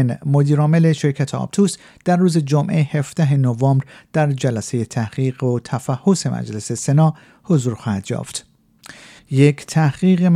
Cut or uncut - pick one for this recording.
cut